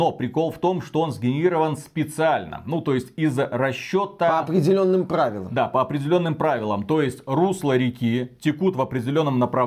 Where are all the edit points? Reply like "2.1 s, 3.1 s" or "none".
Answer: none